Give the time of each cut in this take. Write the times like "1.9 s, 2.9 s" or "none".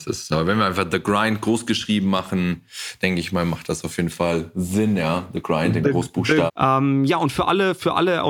6.5 s